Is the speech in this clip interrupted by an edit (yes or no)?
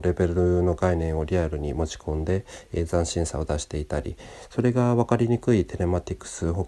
no